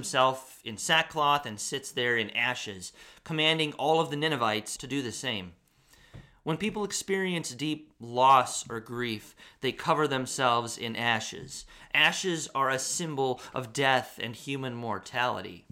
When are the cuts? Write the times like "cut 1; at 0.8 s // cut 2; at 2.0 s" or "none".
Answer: cut 1; at 4.8 s